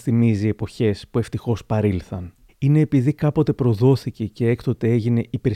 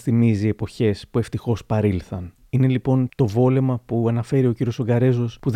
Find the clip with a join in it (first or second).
first